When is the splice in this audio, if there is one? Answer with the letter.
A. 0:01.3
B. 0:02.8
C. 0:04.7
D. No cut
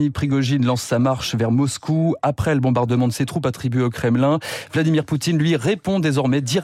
D